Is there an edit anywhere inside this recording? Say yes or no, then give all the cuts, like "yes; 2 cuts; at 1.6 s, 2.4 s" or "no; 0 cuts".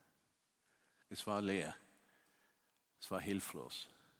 yes; 1 cut; at 1.0 s